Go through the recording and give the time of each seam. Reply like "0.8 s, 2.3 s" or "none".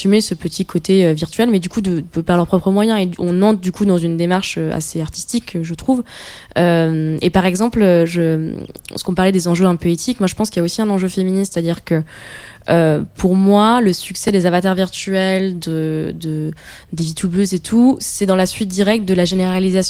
none